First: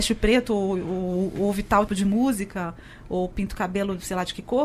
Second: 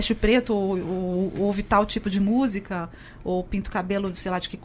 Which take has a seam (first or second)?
first